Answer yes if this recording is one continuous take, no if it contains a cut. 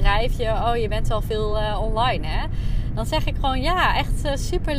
yes